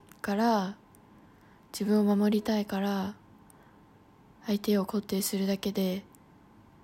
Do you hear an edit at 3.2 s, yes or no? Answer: no